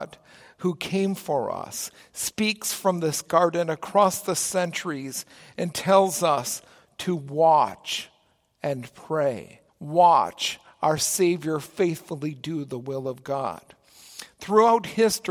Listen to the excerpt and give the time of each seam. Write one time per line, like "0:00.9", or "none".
0:09.7